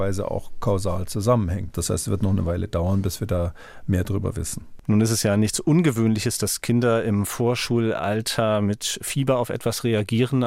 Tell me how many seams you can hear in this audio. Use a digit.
1